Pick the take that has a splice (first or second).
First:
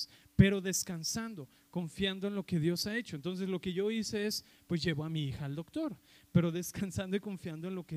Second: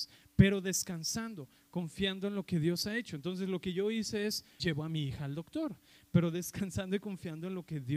second